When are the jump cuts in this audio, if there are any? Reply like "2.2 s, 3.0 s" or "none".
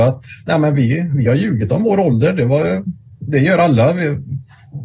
none